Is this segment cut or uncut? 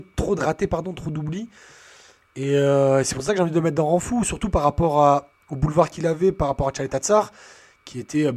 uncut